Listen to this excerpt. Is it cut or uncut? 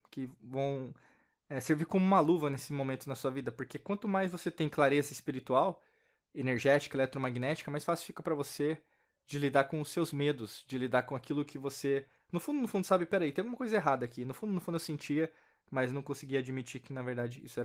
uncut